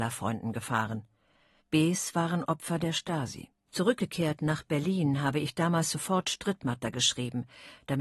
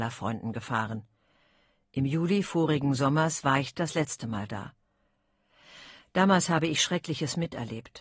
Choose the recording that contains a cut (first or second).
first